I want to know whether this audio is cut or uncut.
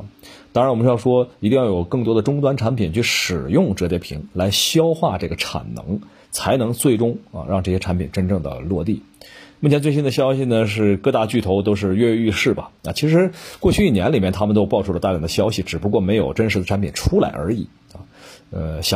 uncut